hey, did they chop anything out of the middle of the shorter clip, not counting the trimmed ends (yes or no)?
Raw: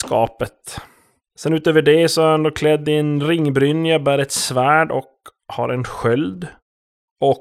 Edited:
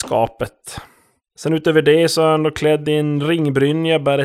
no